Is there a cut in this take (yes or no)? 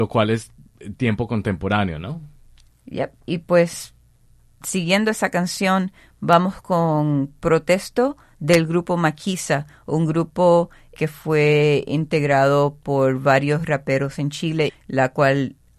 yes